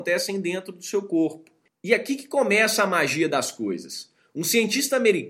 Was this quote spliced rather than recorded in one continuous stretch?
no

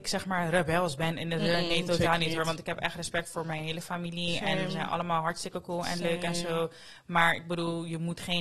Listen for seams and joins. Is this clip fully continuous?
yes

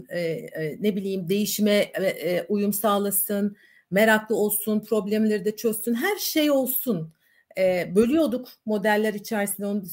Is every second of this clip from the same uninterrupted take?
yes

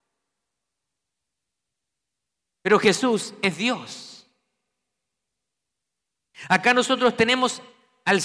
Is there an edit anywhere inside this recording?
no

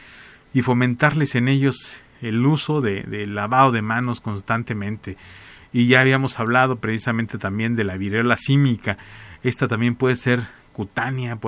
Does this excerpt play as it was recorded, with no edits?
yes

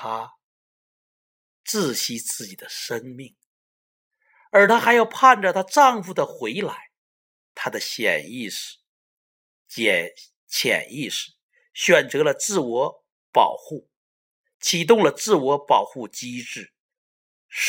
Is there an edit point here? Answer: yes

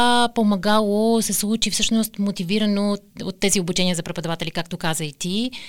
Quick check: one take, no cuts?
yes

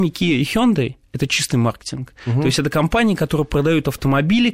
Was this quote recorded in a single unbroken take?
yes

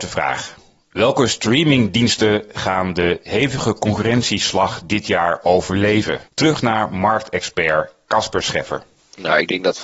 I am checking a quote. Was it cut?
yes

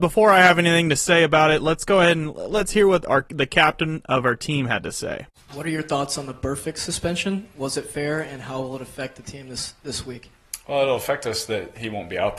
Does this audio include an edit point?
no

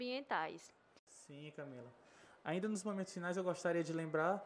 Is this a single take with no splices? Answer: no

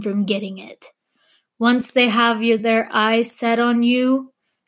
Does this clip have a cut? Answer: no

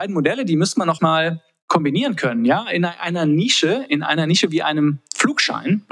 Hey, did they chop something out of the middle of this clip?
yes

